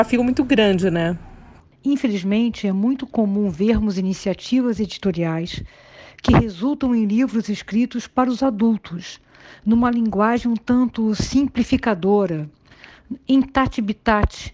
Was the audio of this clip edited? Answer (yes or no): yes